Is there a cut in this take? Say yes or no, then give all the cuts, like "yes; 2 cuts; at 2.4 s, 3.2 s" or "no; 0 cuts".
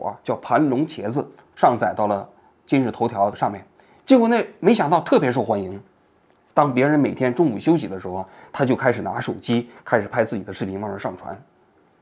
yes; 1 cut; at 6.5 s